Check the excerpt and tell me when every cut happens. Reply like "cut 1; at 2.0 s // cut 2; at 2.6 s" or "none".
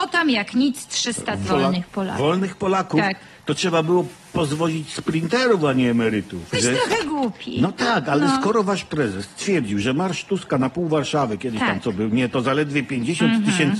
cut 1; at 1.5 s // cut 2; at 6.5 s